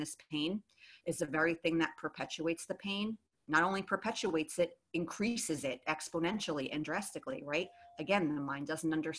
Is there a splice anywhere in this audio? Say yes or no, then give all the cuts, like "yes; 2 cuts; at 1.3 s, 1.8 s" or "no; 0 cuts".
no; 0 cuts